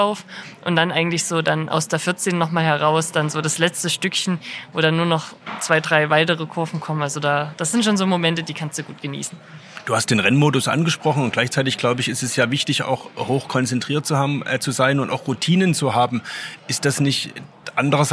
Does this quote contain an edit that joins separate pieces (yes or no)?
no